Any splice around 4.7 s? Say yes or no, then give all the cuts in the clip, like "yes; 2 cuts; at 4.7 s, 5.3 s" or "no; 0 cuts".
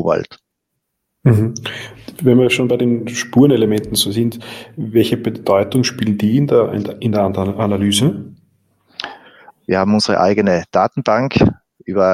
no; 1 cut; at 9.5 s